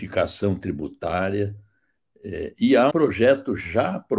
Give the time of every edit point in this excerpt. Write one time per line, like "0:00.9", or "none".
0:02.9